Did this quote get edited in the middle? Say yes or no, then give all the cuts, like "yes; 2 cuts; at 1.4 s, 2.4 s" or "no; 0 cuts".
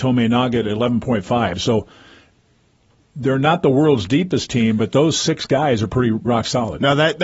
yes; 1 cut; at 6.3 s